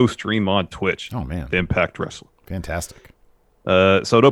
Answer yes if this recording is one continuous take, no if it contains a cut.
yes